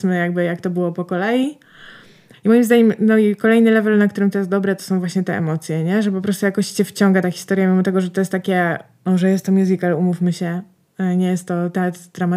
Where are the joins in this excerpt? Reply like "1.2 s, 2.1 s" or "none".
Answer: 2.3 s